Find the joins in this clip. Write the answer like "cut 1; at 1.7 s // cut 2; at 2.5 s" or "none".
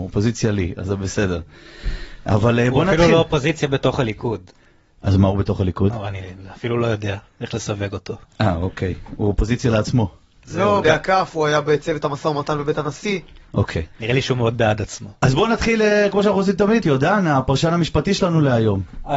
cut 1; at 10.8 s // cut 2; at 16.8 s